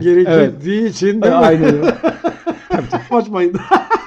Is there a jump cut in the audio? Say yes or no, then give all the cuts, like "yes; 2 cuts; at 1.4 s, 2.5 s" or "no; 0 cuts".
yes; 1 cut; at 3.1 s